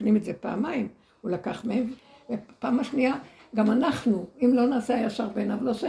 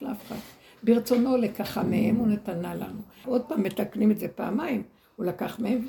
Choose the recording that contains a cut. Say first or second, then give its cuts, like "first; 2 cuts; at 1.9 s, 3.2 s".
second; 1 cut; at 3.2 s